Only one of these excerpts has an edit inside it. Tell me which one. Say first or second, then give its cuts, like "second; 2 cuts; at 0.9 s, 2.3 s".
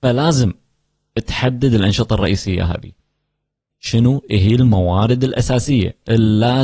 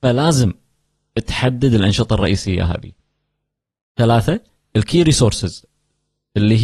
first; 1 cut; at 3.7 s